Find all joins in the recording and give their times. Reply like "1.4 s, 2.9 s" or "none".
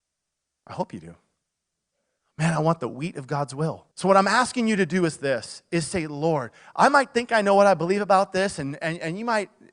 2.2 s, 3.9 s